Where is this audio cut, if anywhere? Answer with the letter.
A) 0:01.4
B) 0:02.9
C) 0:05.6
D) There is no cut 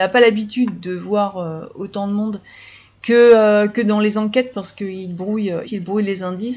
C